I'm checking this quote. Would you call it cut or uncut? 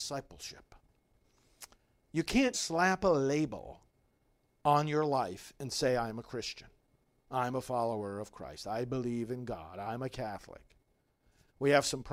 cut